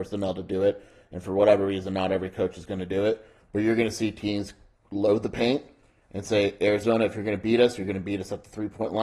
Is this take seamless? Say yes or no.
yes